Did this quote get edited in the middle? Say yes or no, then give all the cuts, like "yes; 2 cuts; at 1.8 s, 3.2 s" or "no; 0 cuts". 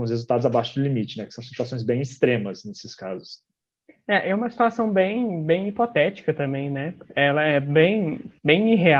no; 0 cuts